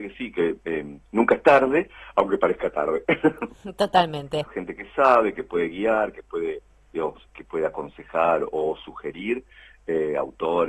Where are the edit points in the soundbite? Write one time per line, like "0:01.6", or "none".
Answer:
0:04.5
0:07.3